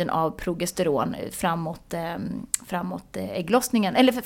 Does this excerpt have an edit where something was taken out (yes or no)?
no